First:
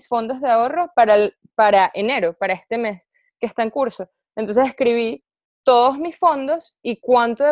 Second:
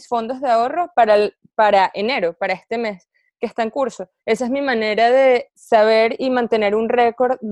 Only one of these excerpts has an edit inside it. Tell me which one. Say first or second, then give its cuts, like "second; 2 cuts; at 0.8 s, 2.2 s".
second; 1 cut; at 4.2 s